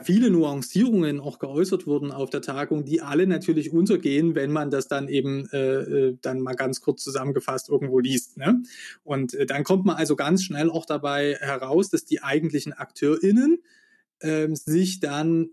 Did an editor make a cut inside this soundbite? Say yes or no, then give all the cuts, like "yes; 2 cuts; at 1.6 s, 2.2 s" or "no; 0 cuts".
no; 0 cuts